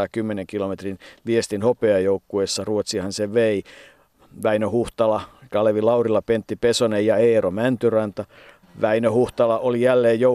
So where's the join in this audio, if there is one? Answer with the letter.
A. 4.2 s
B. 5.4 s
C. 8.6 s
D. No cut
C